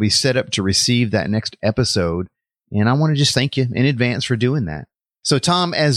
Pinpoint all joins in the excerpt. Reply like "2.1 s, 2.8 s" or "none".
none